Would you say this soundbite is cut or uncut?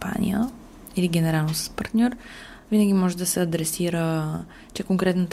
uncut